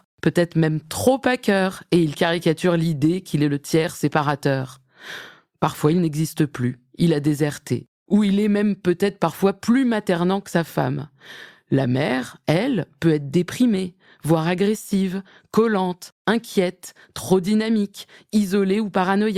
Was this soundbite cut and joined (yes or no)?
no